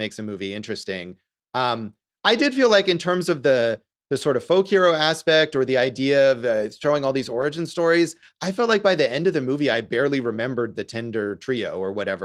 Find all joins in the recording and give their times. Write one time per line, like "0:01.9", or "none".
none